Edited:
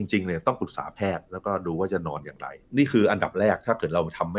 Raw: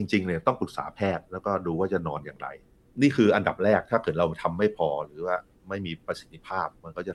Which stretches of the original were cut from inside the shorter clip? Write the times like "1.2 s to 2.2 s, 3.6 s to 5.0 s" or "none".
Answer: 2.6 s to 2.9 s